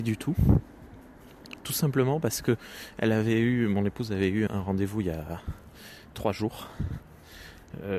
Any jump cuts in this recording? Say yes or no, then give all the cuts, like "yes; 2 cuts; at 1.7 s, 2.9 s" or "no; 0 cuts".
yes; 1 cut; at 4.5 s